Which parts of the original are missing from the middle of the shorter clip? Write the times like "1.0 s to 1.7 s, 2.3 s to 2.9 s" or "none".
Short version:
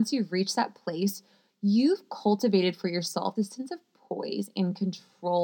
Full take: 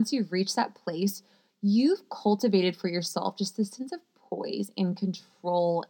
3.4 s to 3.6 s